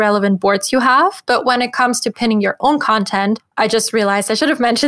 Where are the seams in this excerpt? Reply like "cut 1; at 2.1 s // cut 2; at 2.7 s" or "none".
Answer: cut 1; at 3.5 s